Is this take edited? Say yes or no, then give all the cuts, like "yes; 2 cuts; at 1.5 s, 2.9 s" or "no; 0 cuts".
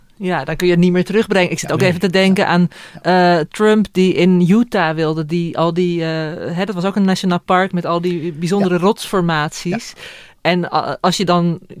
no; 0 cuts